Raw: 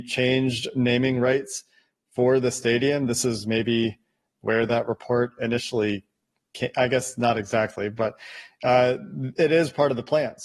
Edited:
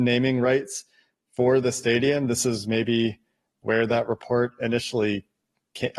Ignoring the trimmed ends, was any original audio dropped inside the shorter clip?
no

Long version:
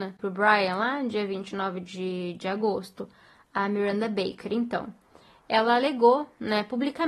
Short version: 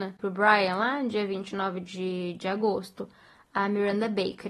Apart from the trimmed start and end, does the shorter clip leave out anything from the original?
no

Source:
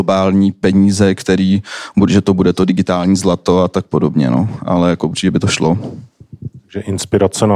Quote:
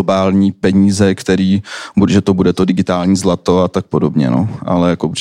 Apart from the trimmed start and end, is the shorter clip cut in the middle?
no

